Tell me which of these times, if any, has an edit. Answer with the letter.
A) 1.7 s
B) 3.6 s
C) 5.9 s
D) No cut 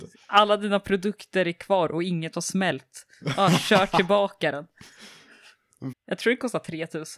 C